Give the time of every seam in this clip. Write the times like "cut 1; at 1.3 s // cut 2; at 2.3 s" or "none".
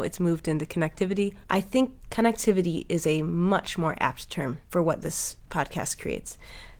cut 1; at 1.4 s // cut 2; at 4.6 s

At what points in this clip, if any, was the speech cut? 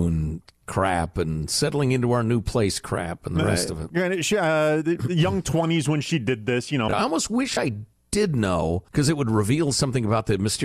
cut 1; at 6.9 s // cut 2; at 8.9 s

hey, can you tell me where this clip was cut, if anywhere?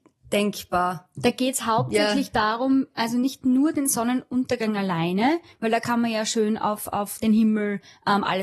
none

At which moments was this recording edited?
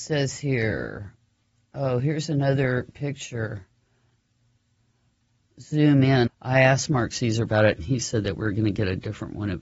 cut 1; at 6.3 s

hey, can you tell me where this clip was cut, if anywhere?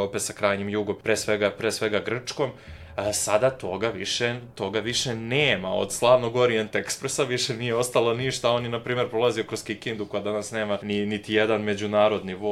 none

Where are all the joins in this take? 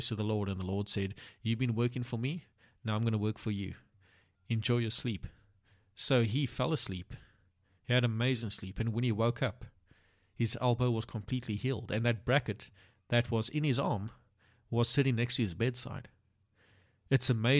none

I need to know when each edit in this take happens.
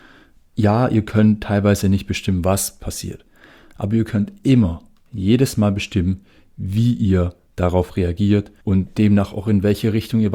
cut 1; at 8.6 s

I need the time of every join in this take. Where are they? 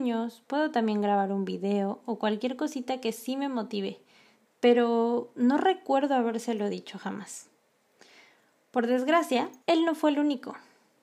cut 1; at 4.4 s // cut 2; at 9.6 s

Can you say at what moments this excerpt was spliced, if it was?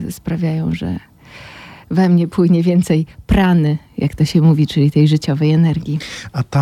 none

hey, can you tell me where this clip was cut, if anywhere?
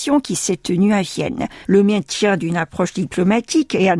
cut 1; at 1.6 s

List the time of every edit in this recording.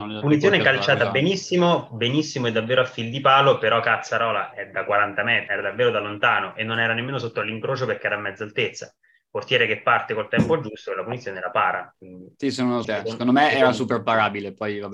cut 1; at 5.5 s // cut 2; at 12.8 s

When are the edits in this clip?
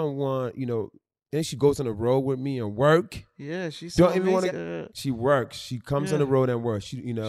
cut 1; at 4.5 s

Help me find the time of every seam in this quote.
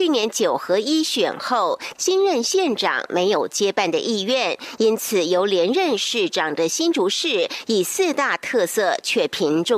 cut 1; at 1.9 s

